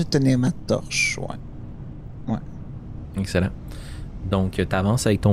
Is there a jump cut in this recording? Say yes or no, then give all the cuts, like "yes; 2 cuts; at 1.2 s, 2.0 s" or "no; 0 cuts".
no; 0 cuts